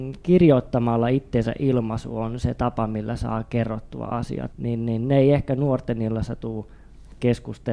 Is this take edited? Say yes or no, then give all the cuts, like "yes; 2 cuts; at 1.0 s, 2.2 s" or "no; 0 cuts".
yes; 1 cut; at 4.5 s